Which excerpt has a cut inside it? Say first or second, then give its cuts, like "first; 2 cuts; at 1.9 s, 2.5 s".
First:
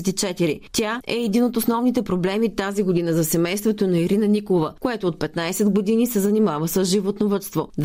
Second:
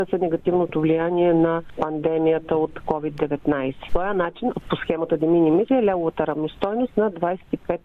second; 2 cuts; at 4.5 s, 5.7 s